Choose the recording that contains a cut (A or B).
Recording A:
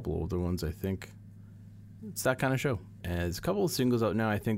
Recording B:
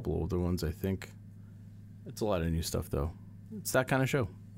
A